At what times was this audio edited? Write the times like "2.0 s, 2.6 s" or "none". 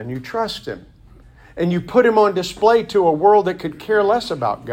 none